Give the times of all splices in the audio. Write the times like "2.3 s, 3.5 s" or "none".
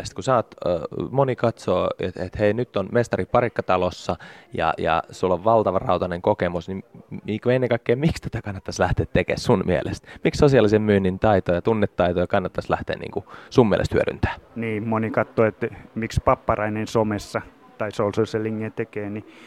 14.5 s